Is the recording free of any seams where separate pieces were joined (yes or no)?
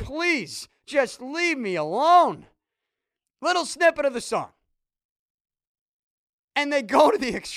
no